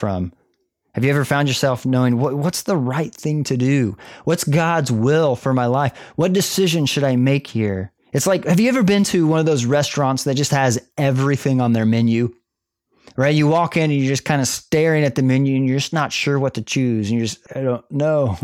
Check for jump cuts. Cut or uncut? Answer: cut